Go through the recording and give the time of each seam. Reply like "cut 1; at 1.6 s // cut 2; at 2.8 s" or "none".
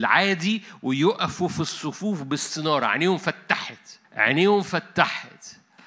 cut 1; at 4.0 s